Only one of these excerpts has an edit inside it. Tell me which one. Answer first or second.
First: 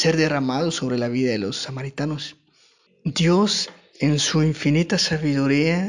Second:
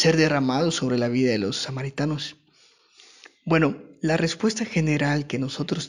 first